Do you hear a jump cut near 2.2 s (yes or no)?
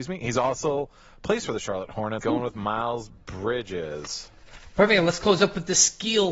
yes